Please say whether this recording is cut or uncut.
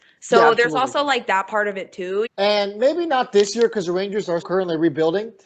cut